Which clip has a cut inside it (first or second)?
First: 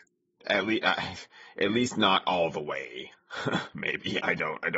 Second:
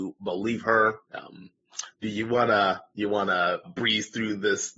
second